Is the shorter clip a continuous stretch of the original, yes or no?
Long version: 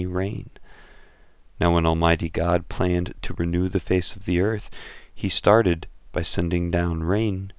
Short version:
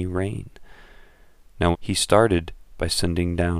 no